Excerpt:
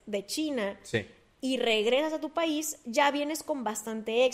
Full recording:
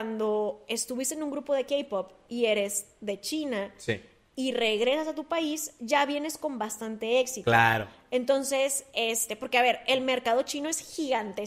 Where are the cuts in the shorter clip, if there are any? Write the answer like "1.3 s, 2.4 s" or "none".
none